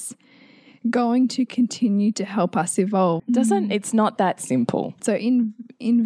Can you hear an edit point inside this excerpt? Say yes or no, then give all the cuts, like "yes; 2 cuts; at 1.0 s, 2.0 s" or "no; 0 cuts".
yes; 2 cuts; at 3.2 s, 5.0 s